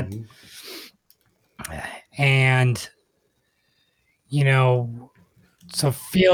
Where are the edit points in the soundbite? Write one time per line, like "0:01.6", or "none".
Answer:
none